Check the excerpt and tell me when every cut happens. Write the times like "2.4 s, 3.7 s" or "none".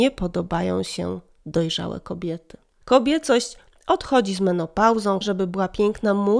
2.8 s, 5.2 s

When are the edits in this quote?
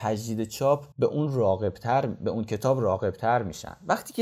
0.9 s

